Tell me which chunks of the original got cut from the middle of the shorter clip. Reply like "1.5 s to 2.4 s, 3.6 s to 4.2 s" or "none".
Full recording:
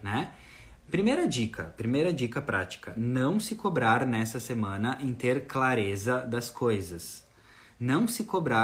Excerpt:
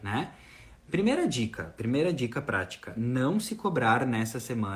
none